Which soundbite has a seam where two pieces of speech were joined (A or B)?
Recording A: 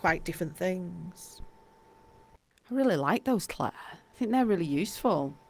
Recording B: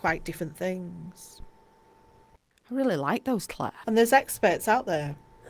B